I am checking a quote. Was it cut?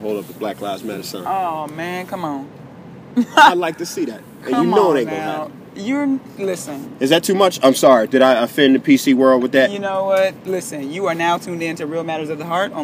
no; 0 cuts

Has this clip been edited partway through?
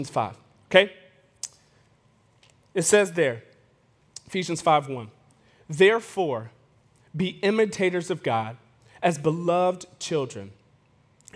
no; 0 cuts

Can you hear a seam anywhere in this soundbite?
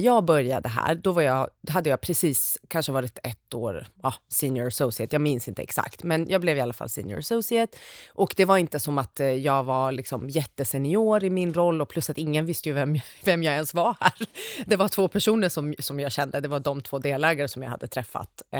no; 0 cuts

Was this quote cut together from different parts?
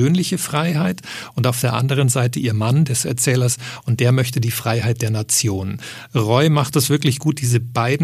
yes; 1 cut; at 2.9 s

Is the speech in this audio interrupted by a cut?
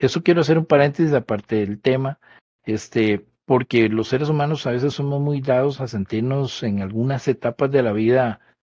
no; 0 cuts

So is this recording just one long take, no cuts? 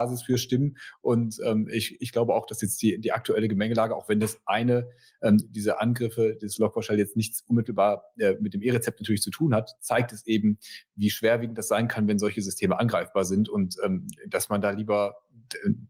yes; 0 cuts

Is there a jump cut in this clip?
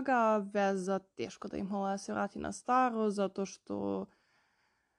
no; 0 cuts

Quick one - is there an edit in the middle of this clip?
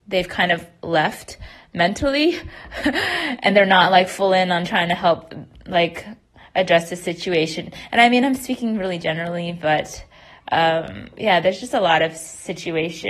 no; 0 cuts

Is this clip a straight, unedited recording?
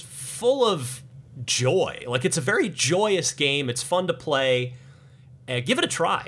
yes; 0 cuts

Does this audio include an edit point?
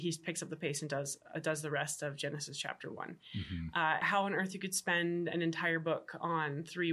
yes; 1 cut; at 4.0 s

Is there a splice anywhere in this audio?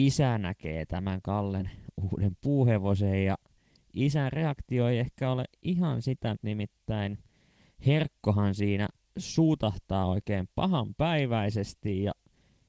yes; 1 cut; at 6.4 s

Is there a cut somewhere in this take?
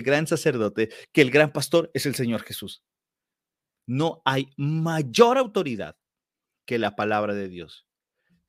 yes; 1 cut; at 3.8 s

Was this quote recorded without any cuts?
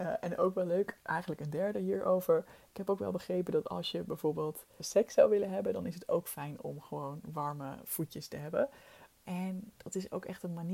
no; 2 cuts; at 4.8 s, 9.2 s

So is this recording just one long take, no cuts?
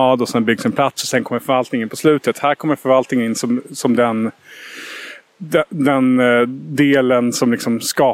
yes; 0 cuts

